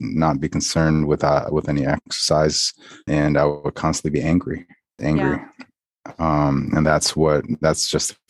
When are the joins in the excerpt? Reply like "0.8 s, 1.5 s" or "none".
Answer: 3.1 s, 5.0 s

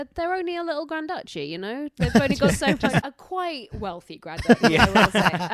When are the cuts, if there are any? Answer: 3.0 s

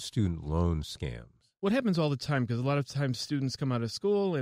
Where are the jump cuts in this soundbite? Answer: none

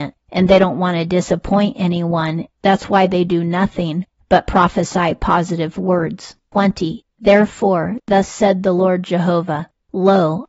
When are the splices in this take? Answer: 6.5 s

